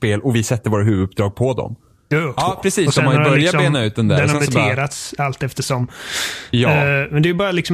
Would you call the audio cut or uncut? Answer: cut